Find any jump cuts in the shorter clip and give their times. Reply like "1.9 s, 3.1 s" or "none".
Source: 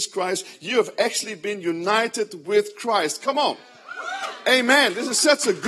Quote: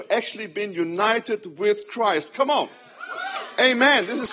none